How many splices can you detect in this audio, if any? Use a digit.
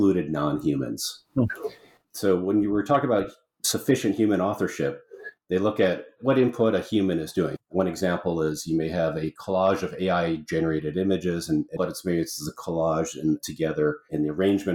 2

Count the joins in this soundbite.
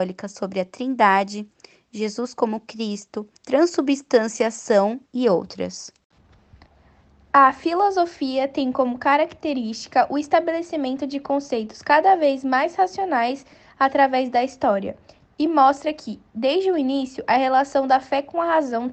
2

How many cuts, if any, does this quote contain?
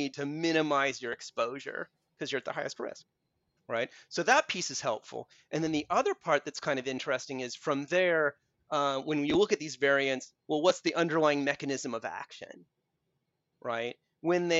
0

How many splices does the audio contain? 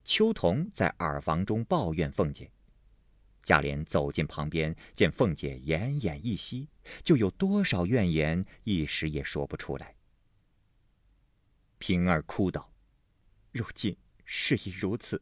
0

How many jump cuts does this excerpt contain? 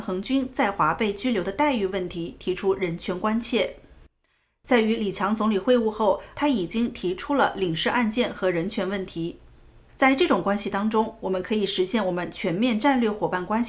2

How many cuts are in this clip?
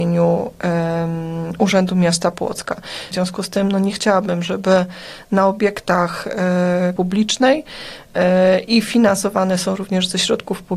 2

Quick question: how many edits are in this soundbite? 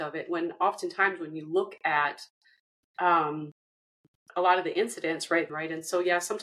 1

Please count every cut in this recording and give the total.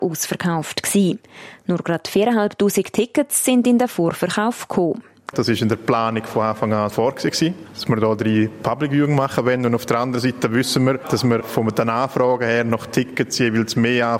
2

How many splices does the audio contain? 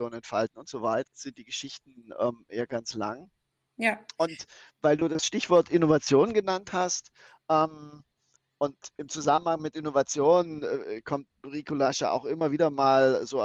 1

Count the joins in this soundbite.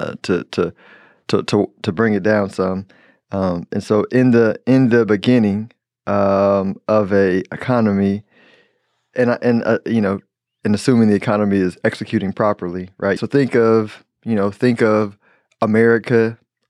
1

